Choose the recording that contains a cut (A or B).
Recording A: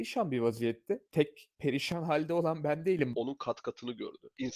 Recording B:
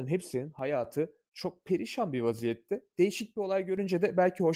A